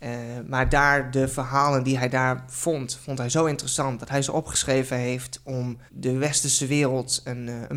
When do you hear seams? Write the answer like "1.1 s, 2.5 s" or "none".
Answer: 5.9 s